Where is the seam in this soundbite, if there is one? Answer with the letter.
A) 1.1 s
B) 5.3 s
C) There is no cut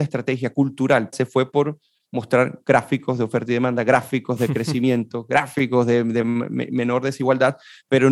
A